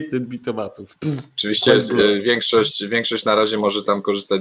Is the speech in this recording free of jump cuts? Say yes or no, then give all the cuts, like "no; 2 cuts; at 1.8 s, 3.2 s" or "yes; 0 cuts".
no; 1 cut; at 0.9 s